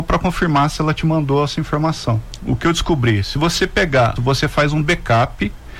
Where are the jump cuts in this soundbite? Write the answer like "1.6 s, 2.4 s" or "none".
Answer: 2.4 s, 4.2 s